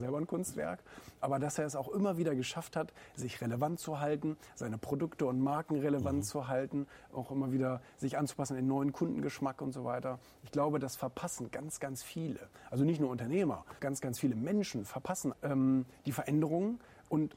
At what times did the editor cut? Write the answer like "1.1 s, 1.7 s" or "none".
13.8 s, 15.3 s